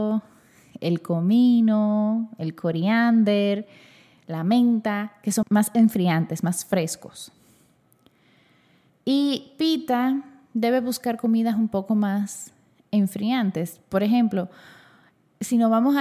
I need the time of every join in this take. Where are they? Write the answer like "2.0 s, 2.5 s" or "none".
5.4 s, 8.9 s